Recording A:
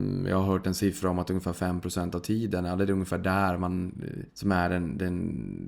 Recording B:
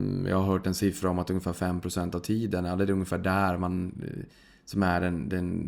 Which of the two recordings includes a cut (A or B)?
A